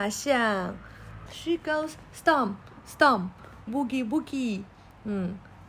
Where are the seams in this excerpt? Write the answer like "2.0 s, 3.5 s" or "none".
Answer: 1.3 s, 3.7 s